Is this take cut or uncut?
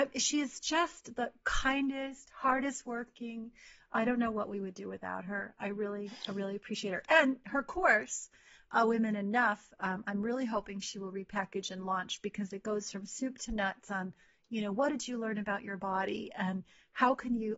uncut